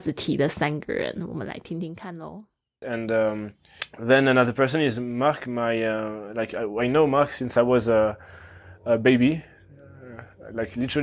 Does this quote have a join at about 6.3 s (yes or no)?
no